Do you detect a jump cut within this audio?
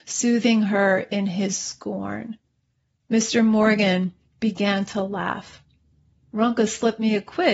no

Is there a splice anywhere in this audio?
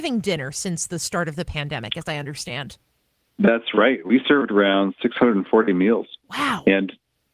no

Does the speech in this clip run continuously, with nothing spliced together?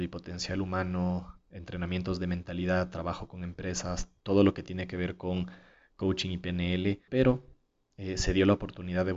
no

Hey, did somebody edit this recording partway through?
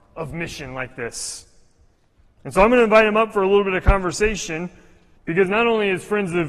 yes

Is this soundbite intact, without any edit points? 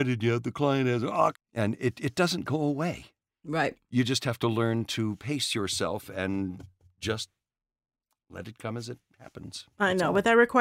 no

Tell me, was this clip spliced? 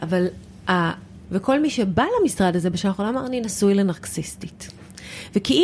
yes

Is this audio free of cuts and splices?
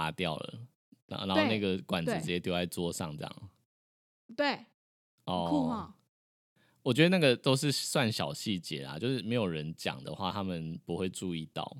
yes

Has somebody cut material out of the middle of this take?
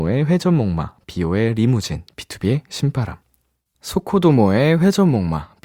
no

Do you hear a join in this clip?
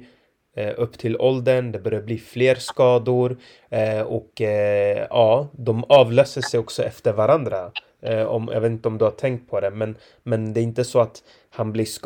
no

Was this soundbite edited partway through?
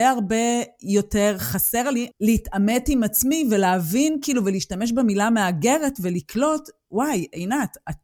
yes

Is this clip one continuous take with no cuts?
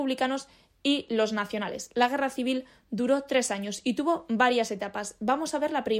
yes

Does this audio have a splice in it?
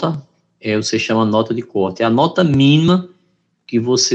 no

